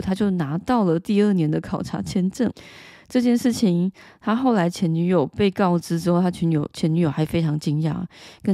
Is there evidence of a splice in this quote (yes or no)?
no